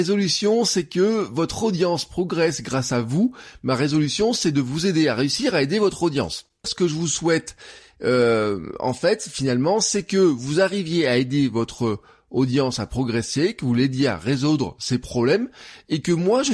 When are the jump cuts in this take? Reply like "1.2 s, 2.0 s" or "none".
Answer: 6.6 s